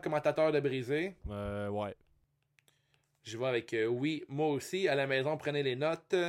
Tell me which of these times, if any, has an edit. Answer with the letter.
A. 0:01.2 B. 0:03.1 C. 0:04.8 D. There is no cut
A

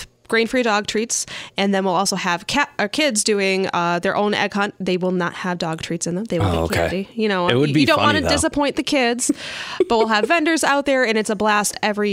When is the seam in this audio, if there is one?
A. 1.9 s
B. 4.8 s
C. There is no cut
C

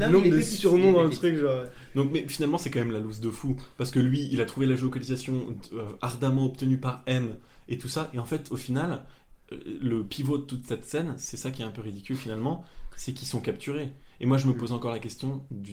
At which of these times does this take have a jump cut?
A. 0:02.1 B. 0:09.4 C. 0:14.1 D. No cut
D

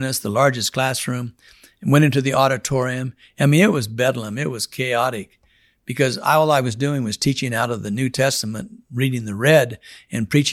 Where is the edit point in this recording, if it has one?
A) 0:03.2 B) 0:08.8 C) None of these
C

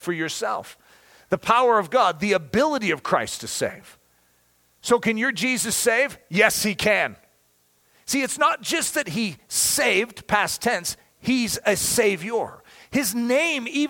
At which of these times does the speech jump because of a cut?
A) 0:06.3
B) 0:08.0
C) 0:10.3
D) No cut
D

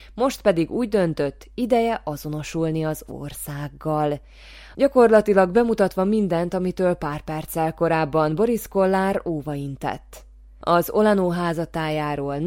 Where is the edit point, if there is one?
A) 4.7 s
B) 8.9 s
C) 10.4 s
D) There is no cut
A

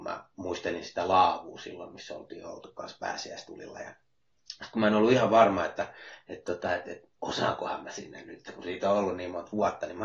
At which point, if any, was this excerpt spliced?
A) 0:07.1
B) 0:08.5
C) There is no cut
A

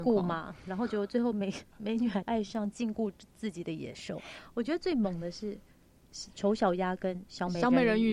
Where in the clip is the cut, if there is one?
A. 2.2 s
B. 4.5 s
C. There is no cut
A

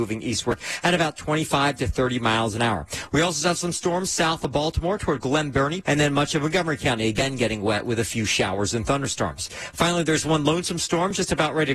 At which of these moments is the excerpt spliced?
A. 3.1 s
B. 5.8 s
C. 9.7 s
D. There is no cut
B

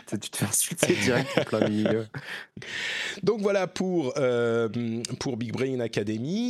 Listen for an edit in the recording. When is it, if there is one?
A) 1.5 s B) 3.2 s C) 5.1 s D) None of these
D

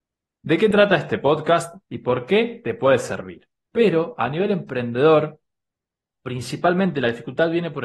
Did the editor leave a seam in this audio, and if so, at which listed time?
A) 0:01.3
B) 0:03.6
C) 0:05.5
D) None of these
B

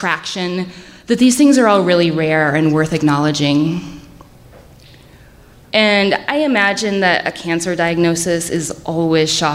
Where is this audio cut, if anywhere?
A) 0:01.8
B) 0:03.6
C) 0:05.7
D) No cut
C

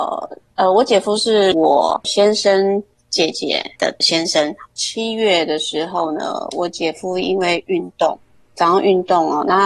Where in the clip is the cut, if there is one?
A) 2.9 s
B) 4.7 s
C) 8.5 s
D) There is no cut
B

